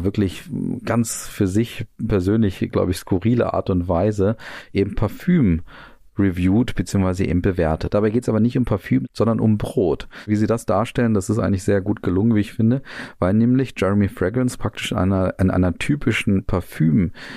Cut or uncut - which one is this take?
cut